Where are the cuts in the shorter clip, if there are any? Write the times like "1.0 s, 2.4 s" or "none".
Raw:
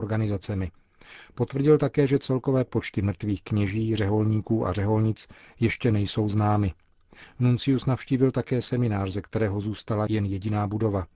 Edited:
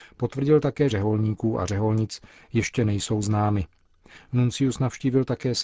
0.9 s